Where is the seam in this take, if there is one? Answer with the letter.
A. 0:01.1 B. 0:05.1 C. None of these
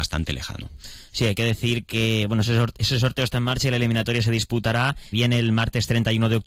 B